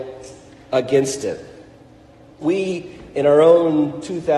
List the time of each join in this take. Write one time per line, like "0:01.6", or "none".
0:02.4